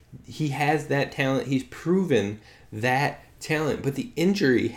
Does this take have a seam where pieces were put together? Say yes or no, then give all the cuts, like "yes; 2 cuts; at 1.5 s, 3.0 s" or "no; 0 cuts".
no; 0 cuts